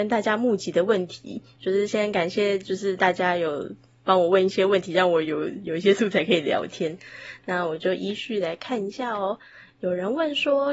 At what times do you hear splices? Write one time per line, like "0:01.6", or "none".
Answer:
none